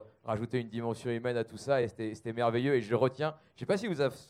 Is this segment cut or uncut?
uncut